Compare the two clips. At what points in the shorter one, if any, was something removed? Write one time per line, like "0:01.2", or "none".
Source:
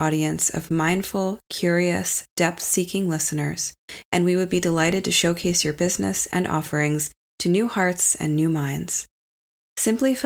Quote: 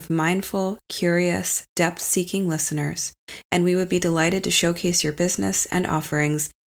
none